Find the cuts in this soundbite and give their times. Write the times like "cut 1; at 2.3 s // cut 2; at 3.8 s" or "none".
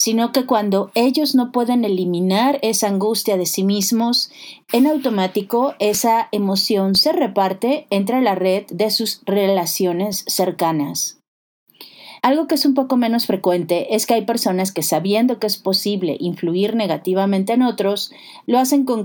cut 1; at 12.2 s

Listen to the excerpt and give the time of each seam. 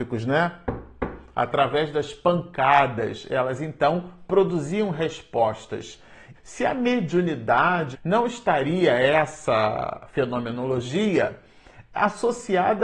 cut 1; at 6.3 s // cut 2; at 7.9 s

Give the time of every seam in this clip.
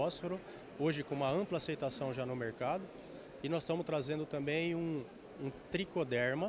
none

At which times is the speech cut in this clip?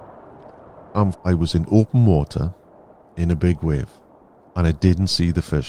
cut 1; at 1.1 s

